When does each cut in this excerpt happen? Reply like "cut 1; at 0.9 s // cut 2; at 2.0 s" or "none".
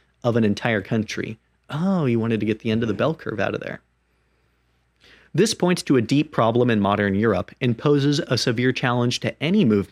none